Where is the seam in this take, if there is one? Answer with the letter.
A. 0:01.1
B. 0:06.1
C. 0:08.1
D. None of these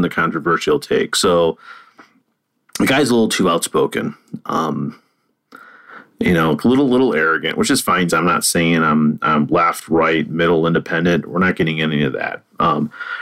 C